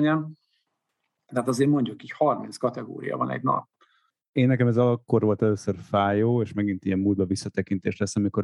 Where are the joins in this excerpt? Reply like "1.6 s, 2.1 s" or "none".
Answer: none